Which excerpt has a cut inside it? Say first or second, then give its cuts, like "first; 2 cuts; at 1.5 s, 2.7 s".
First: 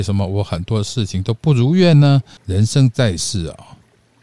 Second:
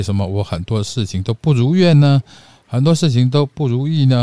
first; 1 cut; at 2.4 s